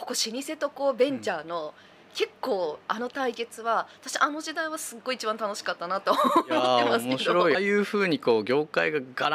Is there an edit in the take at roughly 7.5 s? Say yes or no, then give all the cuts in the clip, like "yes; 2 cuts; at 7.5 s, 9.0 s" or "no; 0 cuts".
yes; 1 cut; at 7.5 s